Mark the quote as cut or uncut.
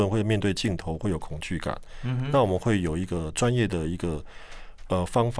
uncut